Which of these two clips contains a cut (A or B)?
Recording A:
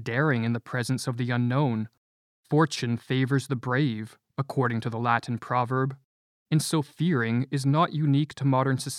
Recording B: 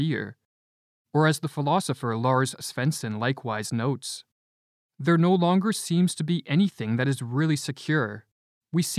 A